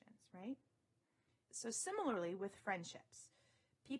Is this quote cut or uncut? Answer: cut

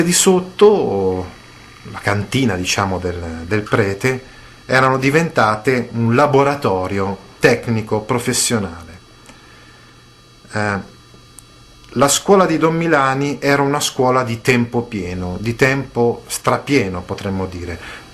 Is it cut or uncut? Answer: cut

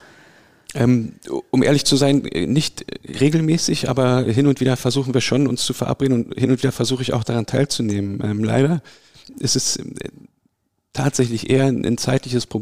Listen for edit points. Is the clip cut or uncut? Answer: uncut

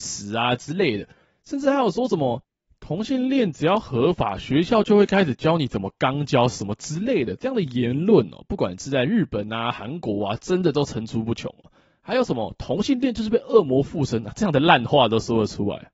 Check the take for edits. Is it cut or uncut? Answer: uncut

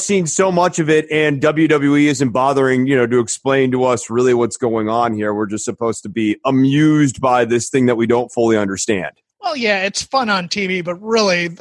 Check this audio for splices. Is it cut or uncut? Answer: uncut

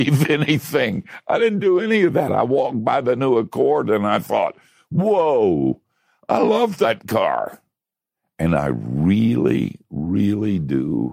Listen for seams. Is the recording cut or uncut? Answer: uncut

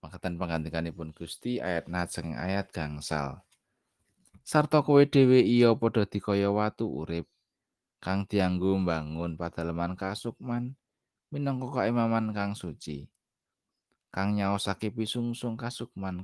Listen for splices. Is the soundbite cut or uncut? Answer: uncut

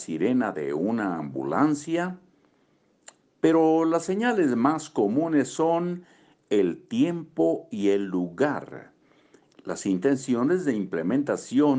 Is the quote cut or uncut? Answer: uncut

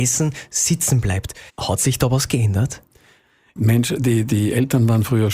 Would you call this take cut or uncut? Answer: cut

